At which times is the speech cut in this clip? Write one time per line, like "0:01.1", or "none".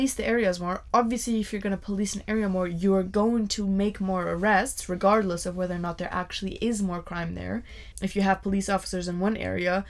0:07.9

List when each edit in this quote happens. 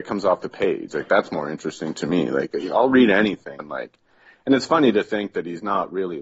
0:03.6

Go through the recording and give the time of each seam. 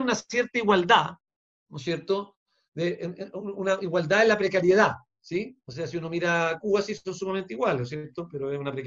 none

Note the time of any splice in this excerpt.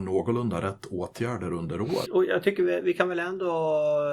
0:02.1

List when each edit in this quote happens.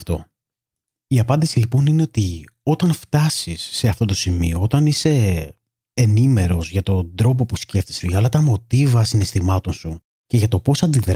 0:08.0

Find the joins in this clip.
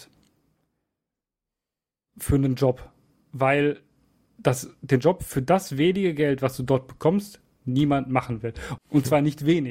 0:08.8

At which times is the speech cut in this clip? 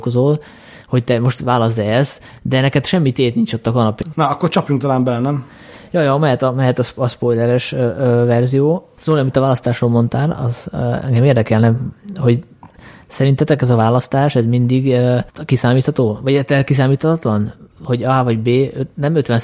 0:04.0

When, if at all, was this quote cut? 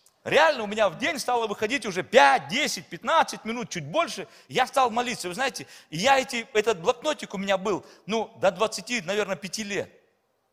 none

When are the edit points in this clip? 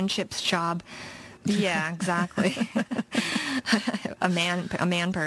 0:01.4

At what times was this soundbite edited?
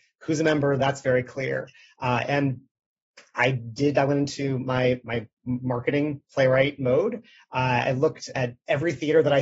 0:08.3

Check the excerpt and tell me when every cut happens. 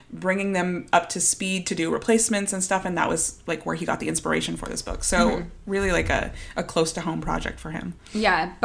none

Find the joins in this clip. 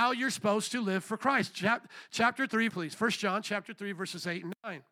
0:02.7

